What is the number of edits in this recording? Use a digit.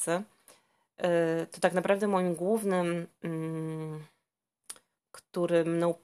1